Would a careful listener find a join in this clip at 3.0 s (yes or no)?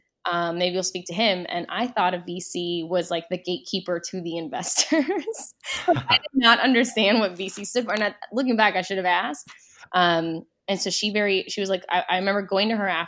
no